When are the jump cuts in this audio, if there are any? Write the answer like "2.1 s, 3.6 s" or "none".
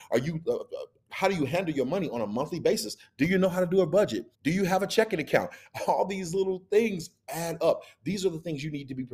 4.3 s